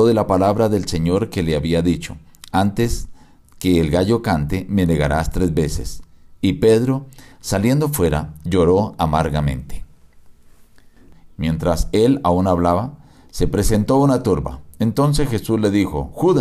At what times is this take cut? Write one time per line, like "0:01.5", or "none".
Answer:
0:11.3